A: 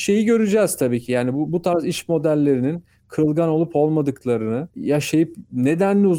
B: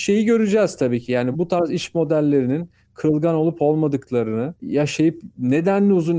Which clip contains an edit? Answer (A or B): B